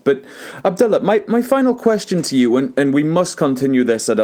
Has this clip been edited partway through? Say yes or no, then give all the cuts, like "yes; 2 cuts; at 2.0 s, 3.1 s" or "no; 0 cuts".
no; 0 cuts